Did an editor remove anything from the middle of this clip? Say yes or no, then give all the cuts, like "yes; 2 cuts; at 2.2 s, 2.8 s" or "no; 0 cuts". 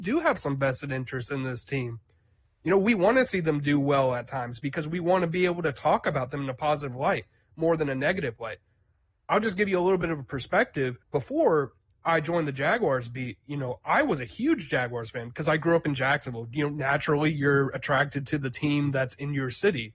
yes; 1 cut; at 11.0 s